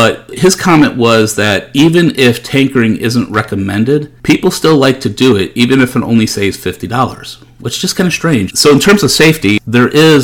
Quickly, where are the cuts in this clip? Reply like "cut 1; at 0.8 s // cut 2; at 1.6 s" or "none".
cut 1; at 8.5 s